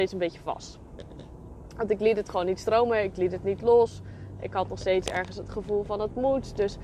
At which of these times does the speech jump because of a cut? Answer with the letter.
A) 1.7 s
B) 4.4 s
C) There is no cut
C